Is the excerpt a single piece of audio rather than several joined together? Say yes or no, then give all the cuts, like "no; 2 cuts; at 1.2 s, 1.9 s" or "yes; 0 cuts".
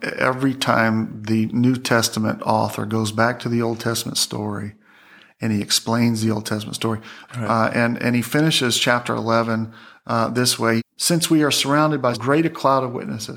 no; 3 cuts; at 7.3 s, 10.8 s, 12.1 s